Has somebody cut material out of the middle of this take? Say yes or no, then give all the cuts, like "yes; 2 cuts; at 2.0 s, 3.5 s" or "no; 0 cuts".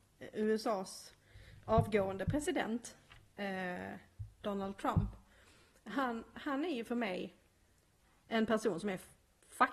no; 0 cuts